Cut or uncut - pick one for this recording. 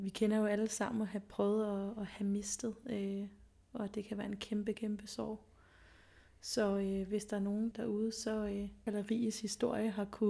cut